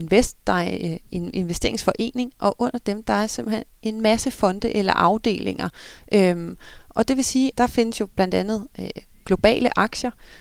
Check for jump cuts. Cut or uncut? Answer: cut